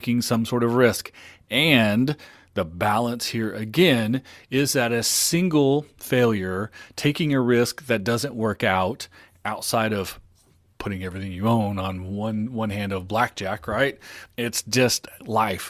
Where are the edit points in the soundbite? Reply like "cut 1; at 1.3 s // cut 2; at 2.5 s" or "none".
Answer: cut 1; at 14.3 s